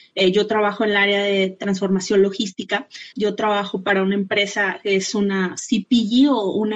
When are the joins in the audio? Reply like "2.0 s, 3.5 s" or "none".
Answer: 3.1 s